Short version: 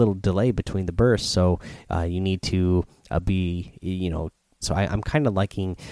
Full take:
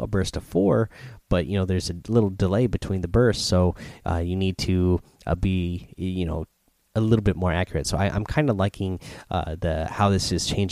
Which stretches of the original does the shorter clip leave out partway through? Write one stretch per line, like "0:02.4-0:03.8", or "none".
0:06.8-0:07.8